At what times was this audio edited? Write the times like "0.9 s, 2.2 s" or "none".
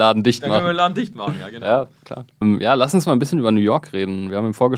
2.4 s